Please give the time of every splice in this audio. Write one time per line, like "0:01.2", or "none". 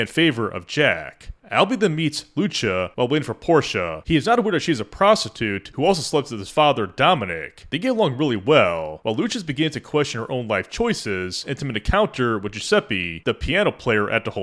0:11.4